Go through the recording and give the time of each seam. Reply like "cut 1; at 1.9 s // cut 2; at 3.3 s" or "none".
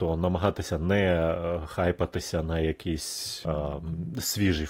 cut 1; at 3.4 s